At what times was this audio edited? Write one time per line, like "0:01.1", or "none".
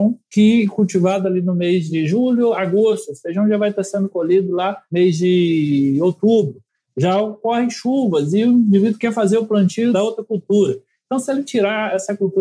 none